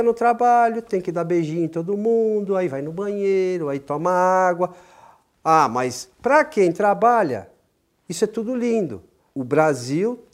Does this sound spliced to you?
yes; 1 cut; at 9.3 s

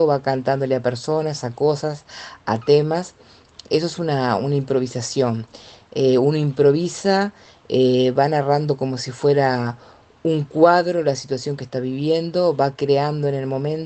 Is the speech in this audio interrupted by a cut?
yes; 1 cut; at 5.8 s

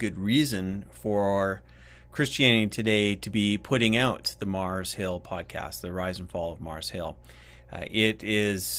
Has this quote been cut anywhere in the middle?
no; 0 cuts

